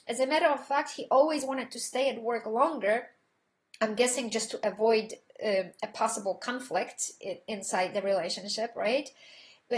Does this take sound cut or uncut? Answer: uncut